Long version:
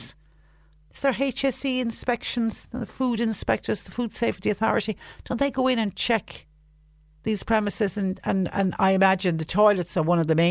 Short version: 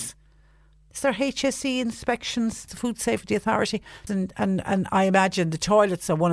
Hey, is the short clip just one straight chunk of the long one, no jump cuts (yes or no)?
no